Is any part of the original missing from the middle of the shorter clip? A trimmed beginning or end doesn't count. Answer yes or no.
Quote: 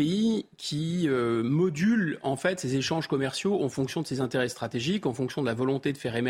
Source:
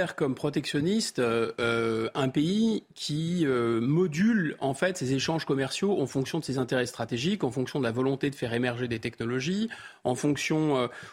no